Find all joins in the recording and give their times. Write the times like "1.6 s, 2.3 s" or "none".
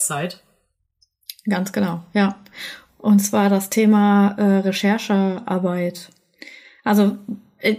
2.9 s